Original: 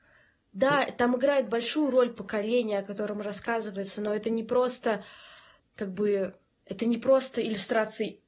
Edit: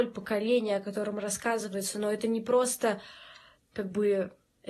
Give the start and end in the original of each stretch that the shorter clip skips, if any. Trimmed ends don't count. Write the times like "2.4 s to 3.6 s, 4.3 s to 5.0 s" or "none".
none